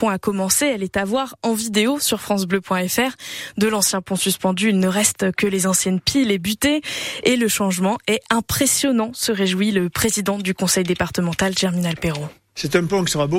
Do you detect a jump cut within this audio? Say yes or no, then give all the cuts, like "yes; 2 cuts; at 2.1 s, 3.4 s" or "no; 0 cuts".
no; 0 cuts